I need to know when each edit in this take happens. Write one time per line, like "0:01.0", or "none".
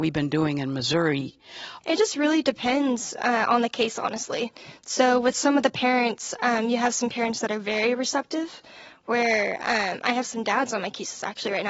0:01.8